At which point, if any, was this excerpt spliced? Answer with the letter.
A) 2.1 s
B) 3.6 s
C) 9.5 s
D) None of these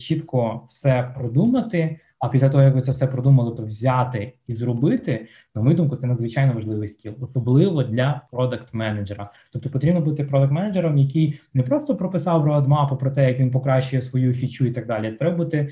B